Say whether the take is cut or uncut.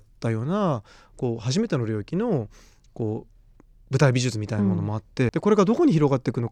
cut